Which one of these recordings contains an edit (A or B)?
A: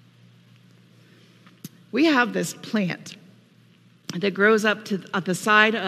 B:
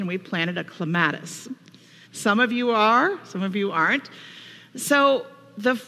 B